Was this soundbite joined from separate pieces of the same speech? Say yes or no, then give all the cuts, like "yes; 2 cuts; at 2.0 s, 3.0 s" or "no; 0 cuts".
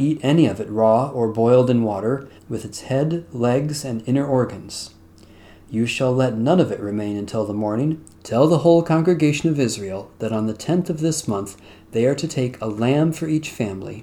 yes; 2 cuts; at 2.4 s, 8.1 s